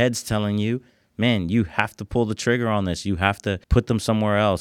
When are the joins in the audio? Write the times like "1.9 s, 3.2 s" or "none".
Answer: 3.6 s